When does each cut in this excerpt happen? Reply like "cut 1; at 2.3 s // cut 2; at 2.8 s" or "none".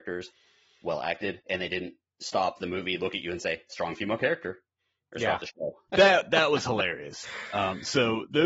cut 1; at 5.9 s